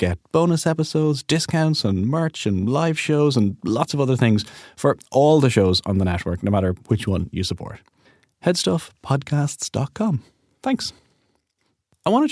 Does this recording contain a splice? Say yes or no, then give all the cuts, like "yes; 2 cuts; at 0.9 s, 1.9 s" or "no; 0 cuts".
no; 0 cuts